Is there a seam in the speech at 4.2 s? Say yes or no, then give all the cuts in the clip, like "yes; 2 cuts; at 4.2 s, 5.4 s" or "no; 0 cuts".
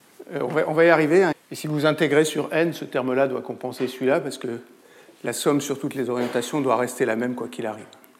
no; 1 cut; at 1.3 s